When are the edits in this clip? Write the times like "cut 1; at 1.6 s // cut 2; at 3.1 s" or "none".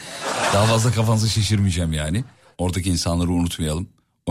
cut 1; at 2.5 s